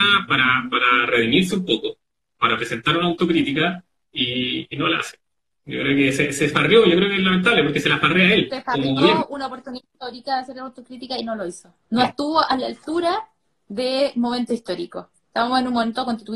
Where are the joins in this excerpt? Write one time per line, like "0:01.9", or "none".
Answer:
0:11.8